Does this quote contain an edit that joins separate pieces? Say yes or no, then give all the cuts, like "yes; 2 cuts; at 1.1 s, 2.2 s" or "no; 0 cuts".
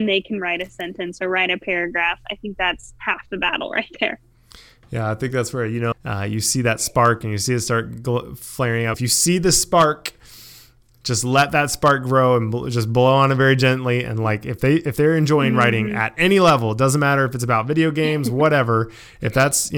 yes; 2 cuts; at 5.9 s, 8.9 s